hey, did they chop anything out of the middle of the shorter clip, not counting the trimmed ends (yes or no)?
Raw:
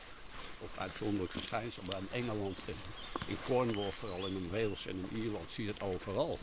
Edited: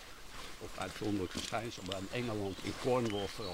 yes